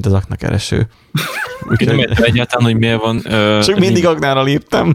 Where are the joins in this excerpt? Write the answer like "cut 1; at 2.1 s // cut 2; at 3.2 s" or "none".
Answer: none

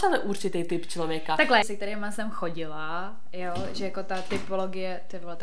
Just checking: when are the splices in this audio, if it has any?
cut 1; at 1.6 s

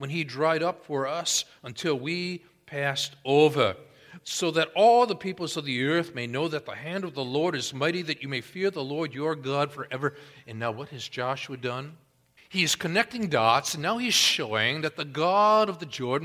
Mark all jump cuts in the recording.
cut 1; at 12.4 s

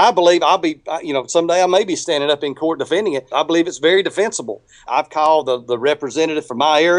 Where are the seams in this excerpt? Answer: cut 1; at 3.3 s // cut 2; at 4.9 s

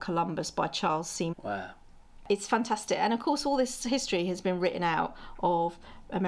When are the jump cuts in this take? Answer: cut 1; at 1.3 s

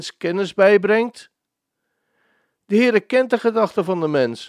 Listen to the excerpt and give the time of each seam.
none

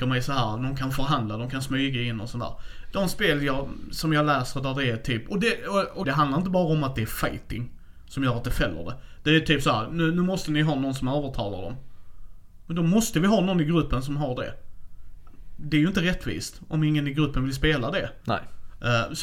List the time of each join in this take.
cut 1; at 6.0 s

